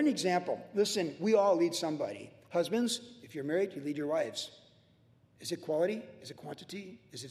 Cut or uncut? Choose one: uncut